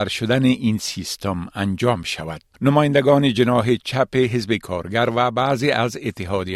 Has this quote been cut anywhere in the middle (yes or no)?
yes